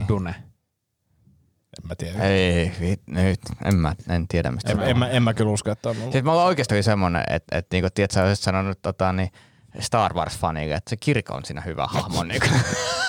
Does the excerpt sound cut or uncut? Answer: uncut